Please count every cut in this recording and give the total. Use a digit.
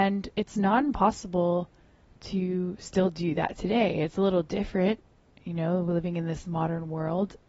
0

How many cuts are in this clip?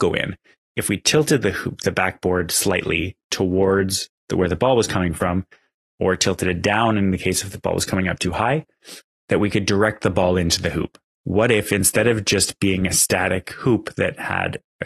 1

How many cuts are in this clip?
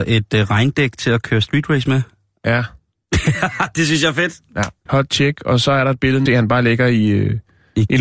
2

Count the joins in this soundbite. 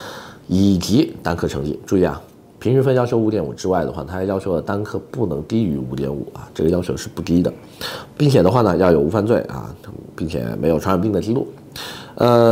0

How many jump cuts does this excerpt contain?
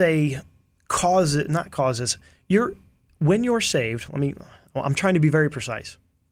0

